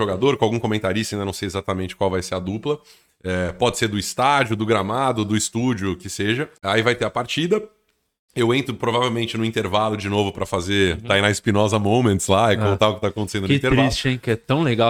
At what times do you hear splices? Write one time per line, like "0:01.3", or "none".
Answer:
0:06.6